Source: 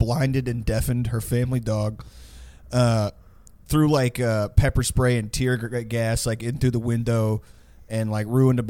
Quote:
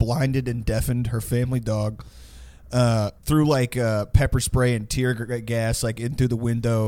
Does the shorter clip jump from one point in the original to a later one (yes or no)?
yes